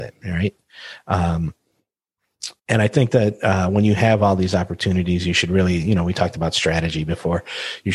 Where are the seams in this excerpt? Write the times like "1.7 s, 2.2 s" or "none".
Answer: 2.6 s